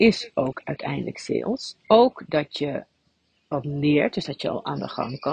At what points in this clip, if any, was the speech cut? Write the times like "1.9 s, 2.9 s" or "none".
1.8 s